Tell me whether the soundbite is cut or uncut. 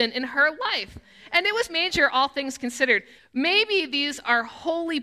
cut